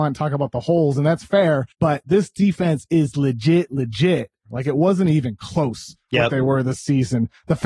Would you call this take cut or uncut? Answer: cut